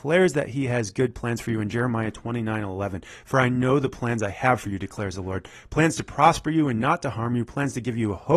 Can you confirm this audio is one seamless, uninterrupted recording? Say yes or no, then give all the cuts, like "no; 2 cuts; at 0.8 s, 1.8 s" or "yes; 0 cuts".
yes; 0 cuts